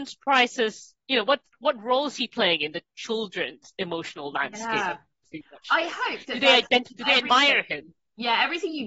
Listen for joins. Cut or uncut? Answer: uncut